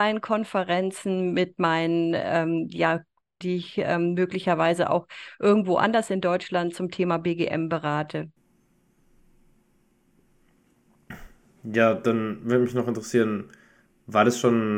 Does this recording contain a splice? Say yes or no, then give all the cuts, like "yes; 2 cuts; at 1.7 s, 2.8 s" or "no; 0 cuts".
yes; 1 cut; at 3.4 s